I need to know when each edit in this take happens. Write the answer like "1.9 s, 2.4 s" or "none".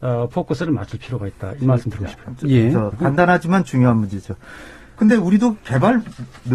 2.9 s, 5.0 s